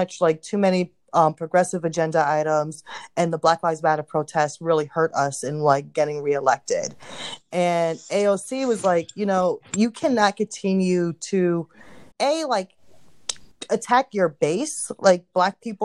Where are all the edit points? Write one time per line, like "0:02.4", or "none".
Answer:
0:12.1